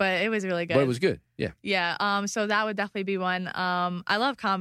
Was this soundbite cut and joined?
no; 0 cuts

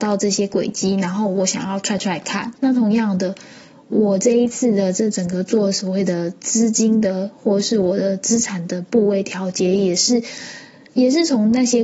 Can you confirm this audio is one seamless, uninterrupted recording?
no; 2 cuts; at 2.5 s, 6.4 s

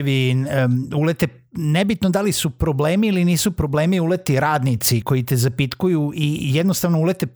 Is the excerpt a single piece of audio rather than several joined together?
no; 1 cut; at 5.0 s

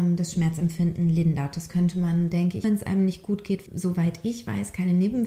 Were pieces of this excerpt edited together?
yes; 2 cuts; at 2.6 s, 3.7 s

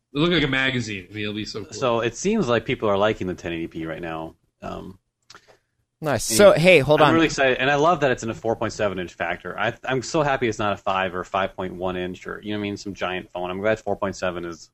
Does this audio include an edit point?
no; 0 cuts

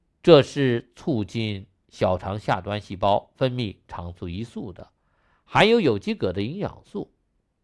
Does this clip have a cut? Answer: no; 0 cuts

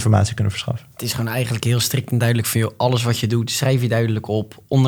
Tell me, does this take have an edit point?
yes; 1 cut; at 0.9 s

